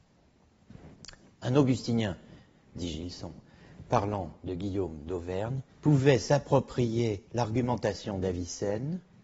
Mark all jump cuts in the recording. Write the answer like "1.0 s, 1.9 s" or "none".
5.7 s, 7.3 s